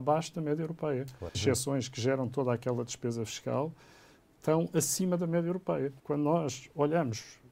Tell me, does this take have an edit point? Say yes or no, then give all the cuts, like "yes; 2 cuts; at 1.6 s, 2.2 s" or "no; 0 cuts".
yes; 2 cuts; at 1.3 s, 6.0 s